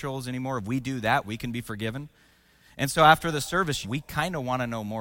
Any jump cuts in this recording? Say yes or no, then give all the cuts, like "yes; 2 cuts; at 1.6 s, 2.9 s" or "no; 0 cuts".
yes; 2 cuts; at 1.2 s, 3.8 s